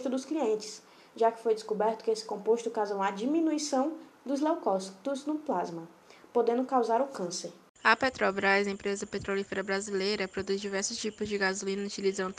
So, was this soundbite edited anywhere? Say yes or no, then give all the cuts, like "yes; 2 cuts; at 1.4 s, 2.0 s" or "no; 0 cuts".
no; 0 cuts